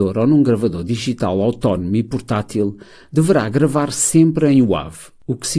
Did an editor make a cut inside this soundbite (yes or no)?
no